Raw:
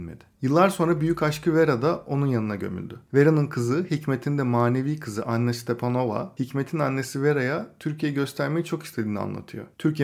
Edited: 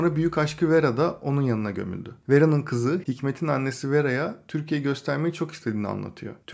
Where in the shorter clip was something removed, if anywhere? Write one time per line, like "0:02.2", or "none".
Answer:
0:03.0

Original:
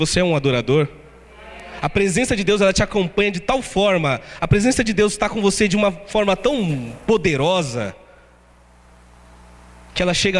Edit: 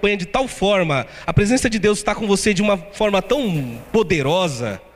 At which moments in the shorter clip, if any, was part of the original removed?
none

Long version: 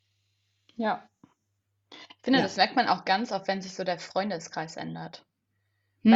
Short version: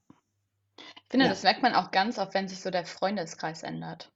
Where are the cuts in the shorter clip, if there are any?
none

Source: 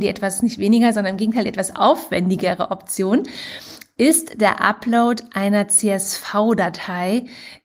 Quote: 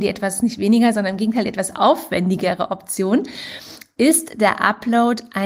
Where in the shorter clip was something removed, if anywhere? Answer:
none

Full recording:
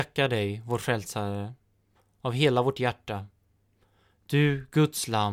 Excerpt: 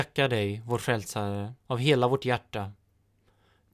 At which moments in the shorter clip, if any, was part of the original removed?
0:01.6

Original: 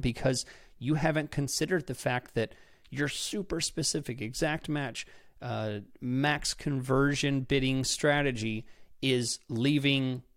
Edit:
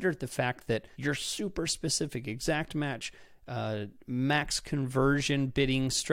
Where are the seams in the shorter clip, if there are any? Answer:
0:00.9

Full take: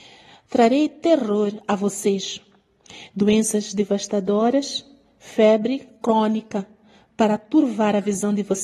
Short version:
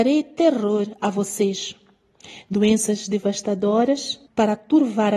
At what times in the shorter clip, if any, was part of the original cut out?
0:04.3

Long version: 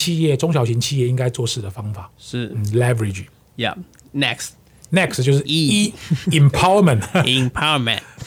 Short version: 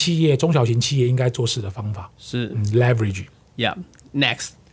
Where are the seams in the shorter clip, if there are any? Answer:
none

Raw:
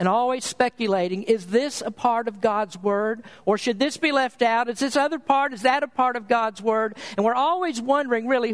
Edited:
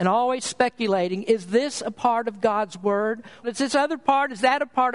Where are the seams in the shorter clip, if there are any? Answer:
0:03.4

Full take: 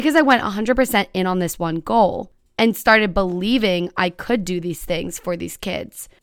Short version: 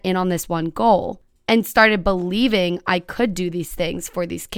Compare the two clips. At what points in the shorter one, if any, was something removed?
none

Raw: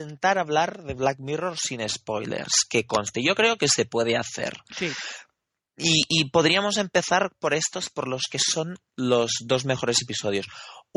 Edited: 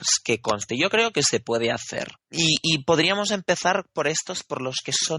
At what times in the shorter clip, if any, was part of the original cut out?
0:02.1

